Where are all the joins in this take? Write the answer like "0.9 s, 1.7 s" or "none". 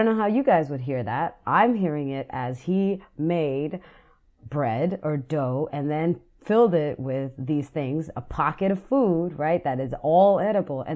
none